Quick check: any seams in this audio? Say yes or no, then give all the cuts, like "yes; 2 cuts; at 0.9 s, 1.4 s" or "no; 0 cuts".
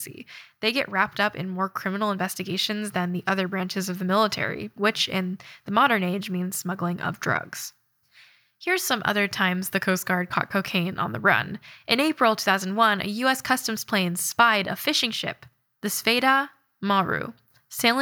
yes; 1 cut; at 4.8 s